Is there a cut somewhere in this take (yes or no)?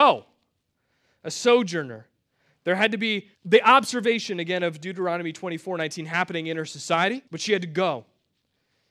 yes